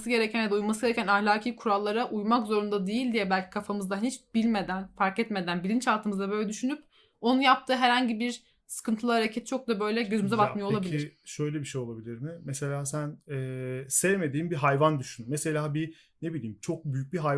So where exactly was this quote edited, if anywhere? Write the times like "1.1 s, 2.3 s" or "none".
none